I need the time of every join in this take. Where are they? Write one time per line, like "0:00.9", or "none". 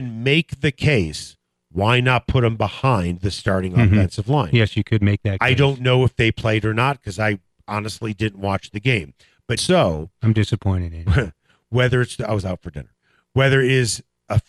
0:09.6